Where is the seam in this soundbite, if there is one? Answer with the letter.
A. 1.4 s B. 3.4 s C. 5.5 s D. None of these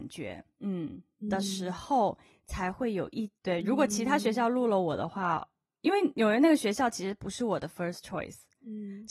B